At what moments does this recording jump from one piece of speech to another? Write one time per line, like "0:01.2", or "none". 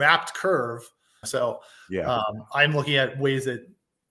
0:01.2